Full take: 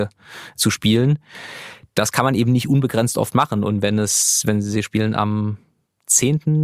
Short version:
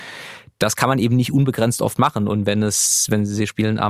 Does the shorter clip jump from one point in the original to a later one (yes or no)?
no